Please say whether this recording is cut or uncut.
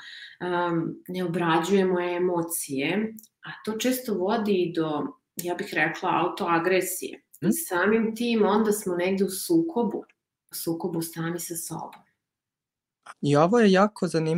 cut